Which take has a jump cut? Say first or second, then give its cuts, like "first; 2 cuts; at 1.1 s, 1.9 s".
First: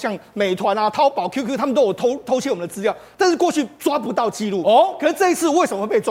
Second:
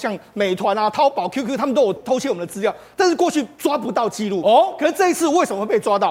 second; 1 cut; at 2.0 s